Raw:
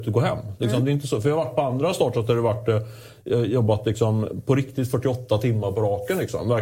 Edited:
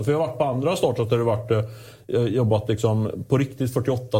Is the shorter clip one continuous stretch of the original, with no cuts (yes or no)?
yes